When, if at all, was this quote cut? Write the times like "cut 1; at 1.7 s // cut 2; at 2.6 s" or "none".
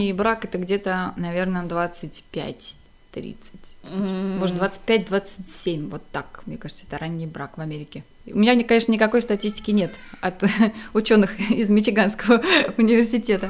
none